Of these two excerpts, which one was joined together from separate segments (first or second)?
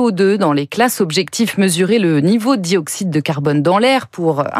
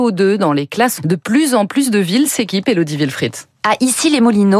second